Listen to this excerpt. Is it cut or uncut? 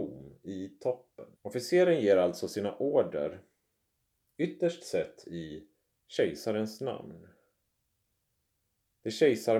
cut